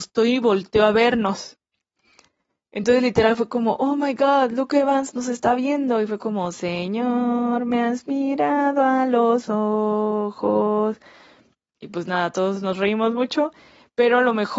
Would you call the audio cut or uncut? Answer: uncut